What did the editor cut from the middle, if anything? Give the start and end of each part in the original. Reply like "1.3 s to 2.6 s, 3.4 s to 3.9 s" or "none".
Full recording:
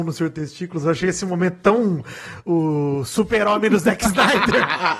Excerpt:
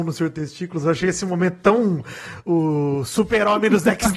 none

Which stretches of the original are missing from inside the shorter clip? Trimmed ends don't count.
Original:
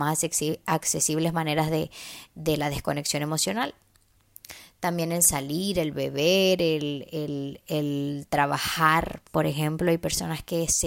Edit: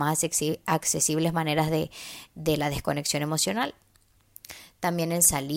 none

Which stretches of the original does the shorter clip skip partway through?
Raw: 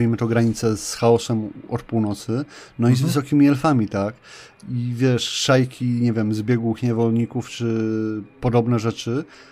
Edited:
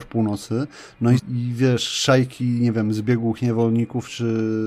3.0 s to 4.6 s

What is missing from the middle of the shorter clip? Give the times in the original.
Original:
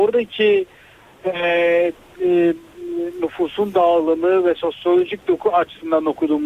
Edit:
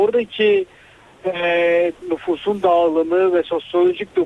2.0 s to 3.1 s

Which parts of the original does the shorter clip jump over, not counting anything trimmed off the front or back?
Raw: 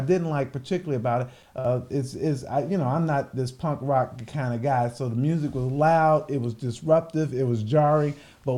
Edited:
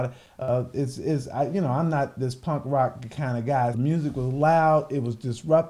4.9 s to 5.1 s

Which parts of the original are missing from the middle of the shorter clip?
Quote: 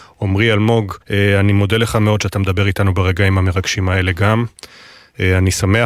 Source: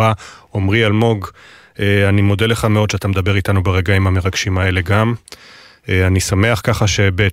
1.3 s to 1.7 s

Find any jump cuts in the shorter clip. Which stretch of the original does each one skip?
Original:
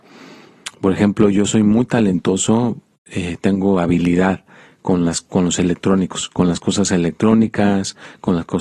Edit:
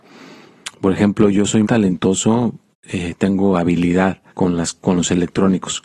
1.6 s to 1.9 s, 4.5 s to 4.8 s

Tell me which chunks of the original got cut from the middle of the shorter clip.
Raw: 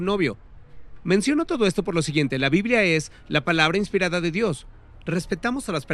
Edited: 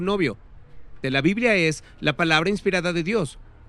1.0 s to 2.3 s

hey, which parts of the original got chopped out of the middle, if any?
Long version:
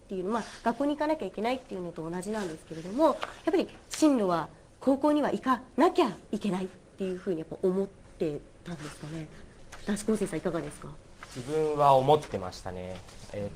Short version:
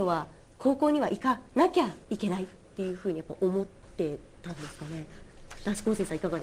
none

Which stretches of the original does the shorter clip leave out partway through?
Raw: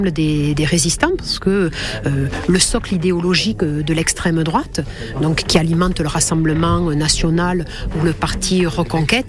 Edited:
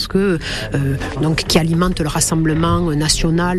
2.5 s to 5.1 s

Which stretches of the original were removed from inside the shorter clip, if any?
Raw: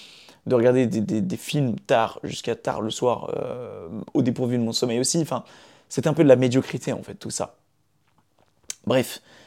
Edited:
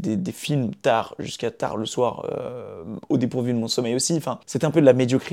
5.5 s to 5.9 s

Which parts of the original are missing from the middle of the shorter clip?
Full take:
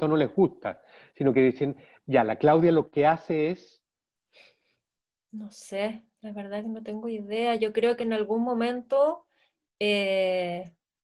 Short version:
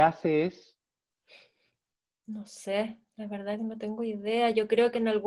none

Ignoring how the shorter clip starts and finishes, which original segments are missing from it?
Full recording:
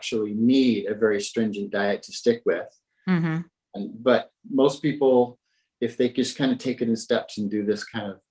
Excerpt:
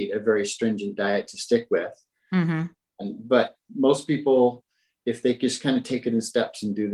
none

